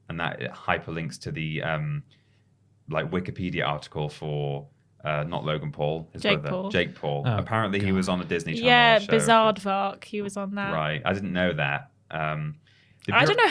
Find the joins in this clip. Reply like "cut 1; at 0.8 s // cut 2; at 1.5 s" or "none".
none